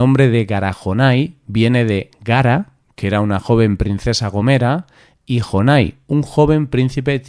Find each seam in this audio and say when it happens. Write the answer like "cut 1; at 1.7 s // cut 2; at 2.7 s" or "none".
none